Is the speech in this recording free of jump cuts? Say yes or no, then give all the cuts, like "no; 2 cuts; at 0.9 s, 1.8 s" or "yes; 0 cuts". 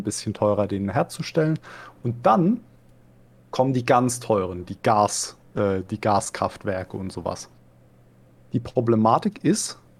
yes; 0 cuts